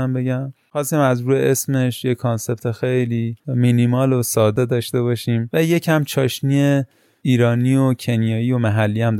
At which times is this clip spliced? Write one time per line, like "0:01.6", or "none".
0:03.4